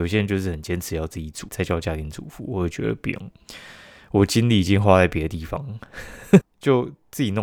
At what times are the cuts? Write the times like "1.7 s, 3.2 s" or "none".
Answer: 1.5 s, 6.4 s